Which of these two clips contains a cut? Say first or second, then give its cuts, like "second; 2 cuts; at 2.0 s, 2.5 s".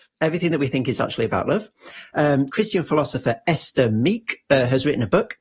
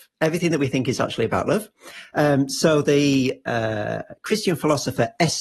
first; 1 cut; at 2.5 s